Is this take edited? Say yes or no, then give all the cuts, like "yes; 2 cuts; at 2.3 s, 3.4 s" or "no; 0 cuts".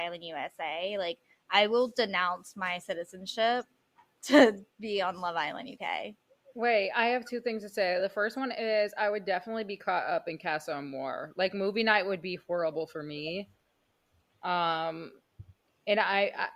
no; 0 cuts